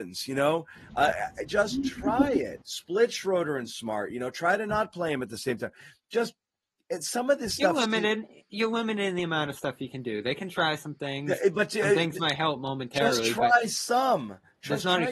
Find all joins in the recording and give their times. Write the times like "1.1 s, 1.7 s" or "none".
2.6 s